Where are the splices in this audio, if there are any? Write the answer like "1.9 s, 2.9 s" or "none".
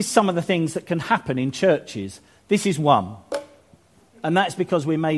4.1 s